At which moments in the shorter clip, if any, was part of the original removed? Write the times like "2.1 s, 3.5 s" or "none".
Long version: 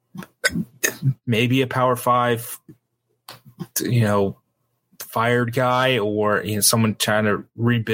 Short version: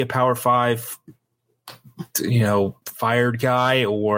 2.8 s